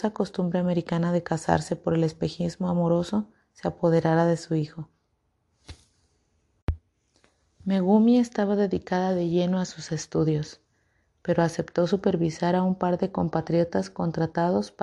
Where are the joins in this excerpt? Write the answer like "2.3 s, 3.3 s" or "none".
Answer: none